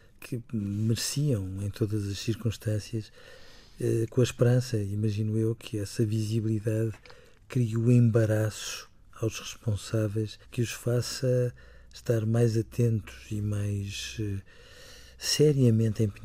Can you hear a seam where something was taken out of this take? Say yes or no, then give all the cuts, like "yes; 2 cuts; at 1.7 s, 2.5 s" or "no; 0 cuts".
yes; 1 cut; at 10.4 s